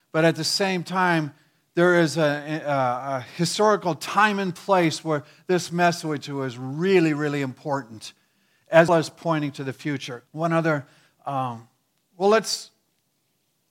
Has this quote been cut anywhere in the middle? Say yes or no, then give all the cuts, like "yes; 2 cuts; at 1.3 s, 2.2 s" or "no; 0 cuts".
yes; 2 cuts; at 8.9 s, 10.3 s